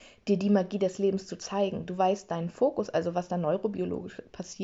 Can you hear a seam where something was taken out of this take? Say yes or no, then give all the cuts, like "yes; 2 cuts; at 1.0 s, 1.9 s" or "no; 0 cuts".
no; 0 cuts